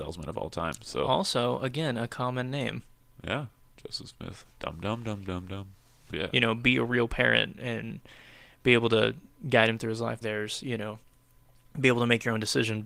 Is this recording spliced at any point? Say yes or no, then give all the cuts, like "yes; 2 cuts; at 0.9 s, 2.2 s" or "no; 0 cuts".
yes; 2 cuts; at 6.1 s, 10.2 s